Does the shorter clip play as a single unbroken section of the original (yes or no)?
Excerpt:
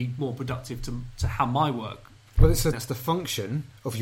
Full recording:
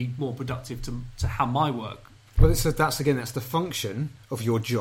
no